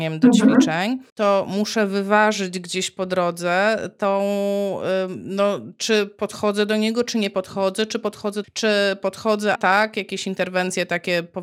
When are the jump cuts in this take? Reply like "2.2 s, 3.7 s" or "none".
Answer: 1.1 s, 8.4 s, 9.6 s